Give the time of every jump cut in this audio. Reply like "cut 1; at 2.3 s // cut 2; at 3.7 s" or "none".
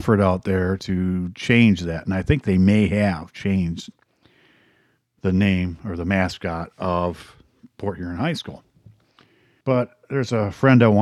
cut 1; at 9.6 s